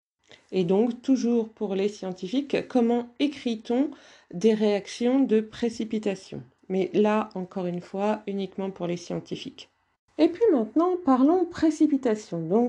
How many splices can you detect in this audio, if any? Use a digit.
1